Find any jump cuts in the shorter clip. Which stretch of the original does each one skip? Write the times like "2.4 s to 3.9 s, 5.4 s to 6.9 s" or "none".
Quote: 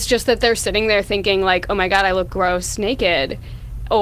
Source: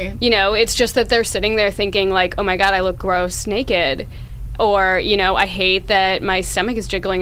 none

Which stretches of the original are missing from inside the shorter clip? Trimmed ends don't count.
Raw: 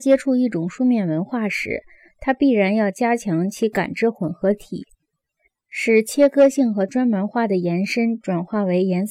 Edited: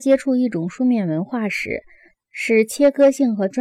2.1 s to 5.5 s

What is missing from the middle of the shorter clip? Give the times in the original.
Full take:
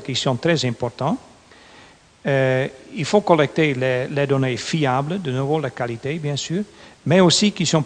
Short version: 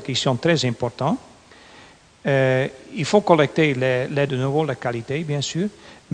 4.3 s to 5.2 s

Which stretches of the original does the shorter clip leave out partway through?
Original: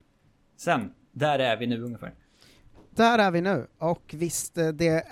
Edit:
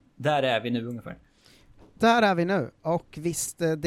none

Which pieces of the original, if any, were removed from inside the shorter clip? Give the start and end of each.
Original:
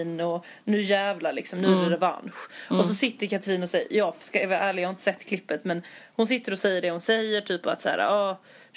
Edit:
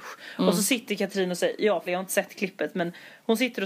4.2 s to 4.8 s

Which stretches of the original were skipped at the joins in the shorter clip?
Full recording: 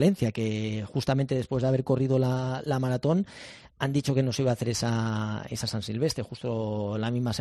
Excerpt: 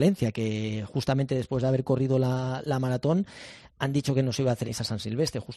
4.6 s to 5.5 s

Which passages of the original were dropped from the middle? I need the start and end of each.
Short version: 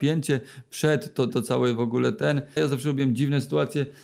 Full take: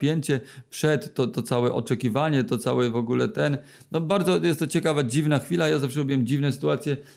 1.3 s to 2.5 s, 3.7 s to 5.7 s

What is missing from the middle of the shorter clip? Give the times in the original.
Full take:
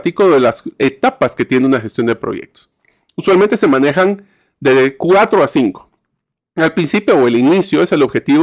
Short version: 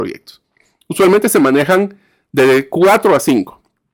none

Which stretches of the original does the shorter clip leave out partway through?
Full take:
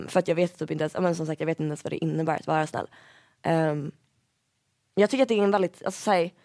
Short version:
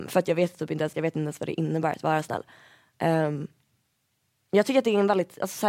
0.9 s to 1.4 s

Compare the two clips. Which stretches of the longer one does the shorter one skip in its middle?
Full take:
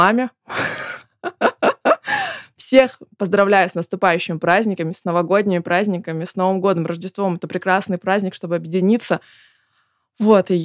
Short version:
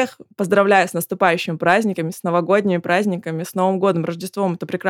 none

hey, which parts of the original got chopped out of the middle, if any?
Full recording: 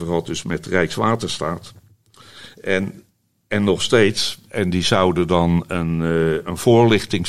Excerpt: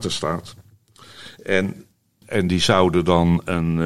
3.4 s to 4.4 s

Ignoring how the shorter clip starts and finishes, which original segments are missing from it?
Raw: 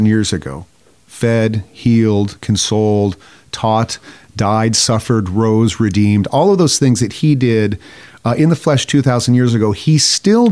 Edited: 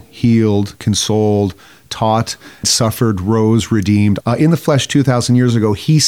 4.3 s to 4.7 s, 6.3 s to 8.2 s

